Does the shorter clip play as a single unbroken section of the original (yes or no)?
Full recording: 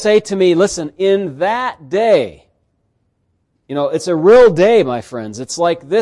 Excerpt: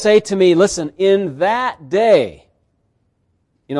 yes